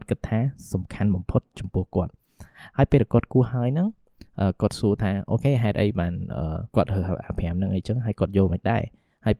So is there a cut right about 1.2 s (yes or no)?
no